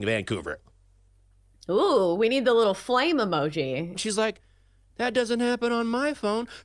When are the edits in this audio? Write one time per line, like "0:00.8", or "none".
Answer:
0:03.9